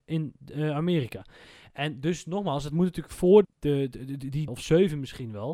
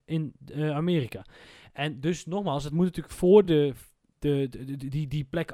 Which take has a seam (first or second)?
first